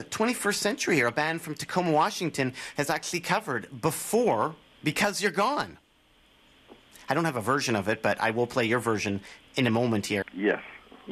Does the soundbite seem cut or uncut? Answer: cut